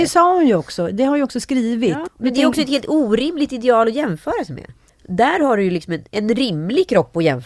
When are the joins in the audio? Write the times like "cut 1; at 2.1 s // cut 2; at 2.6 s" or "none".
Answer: cut 1; at 2.1 s // cut 2; at 4.9 s